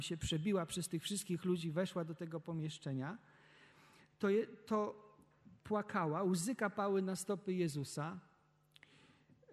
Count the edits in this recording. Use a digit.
1